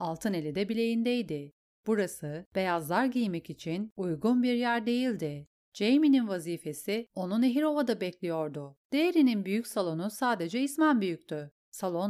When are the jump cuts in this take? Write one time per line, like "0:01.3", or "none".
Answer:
0:08.8